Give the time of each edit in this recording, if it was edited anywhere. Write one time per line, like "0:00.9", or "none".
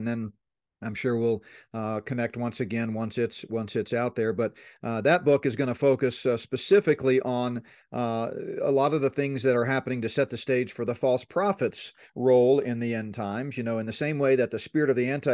none

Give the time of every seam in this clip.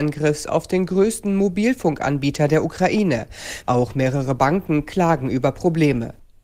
0:03.6

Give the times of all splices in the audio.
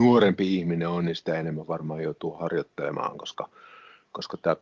none

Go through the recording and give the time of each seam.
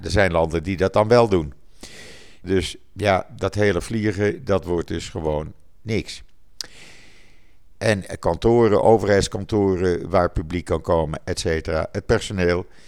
0:02.4
0:07.8

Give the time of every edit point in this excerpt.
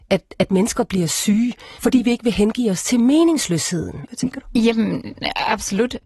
0:01.8
0:04.0

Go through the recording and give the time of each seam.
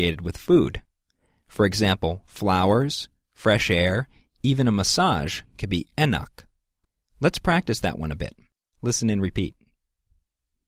none

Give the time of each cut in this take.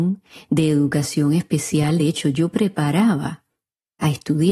none

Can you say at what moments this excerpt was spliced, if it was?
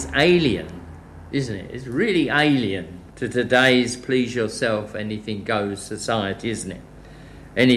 0:03.1

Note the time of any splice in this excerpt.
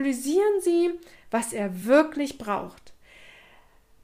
none

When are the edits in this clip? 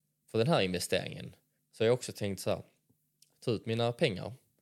0:01.6
0:03.3

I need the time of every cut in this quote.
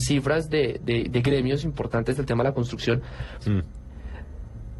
0:03.4

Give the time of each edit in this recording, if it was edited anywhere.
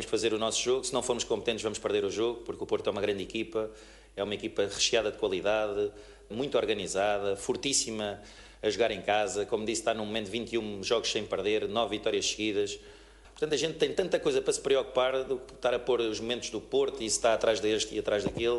0:13.2

